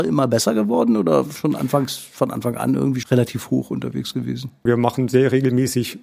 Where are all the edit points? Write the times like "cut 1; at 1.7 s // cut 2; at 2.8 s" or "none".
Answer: cut 1; at 3.0 s // cut 2; at 4.7 s